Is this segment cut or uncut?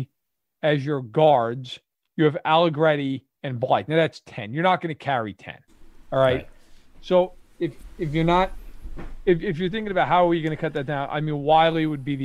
cut